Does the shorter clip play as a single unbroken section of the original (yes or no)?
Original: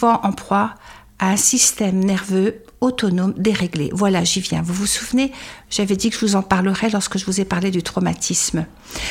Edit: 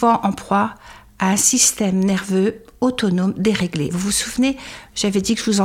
no